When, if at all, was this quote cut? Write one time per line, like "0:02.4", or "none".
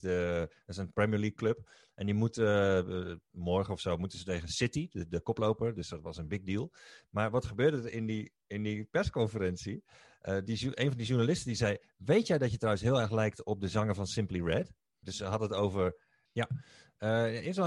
0:15.0
0:16.3